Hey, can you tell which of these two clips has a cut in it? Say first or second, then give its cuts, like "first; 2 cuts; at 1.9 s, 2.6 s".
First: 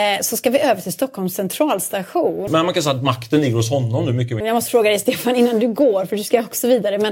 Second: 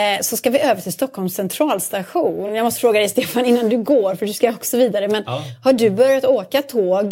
first; 2 cuts; at 2.5 s, 4.4 s